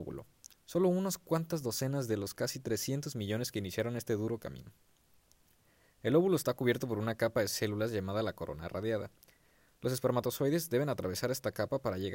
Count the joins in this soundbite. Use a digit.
0